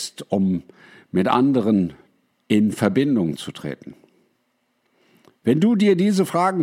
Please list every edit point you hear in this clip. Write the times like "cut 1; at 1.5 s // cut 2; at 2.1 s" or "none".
none